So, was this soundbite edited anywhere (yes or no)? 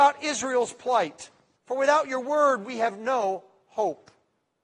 yes